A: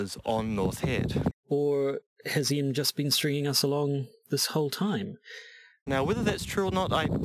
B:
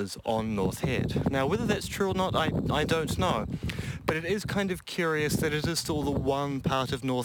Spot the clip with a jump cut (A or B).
A